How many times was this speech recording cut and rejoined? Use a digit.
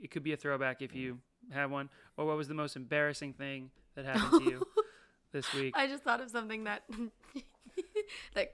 0